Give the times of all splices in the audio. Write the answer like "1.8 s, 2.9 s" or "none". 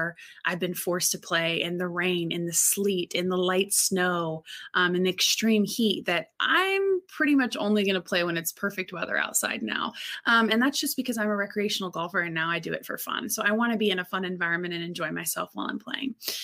none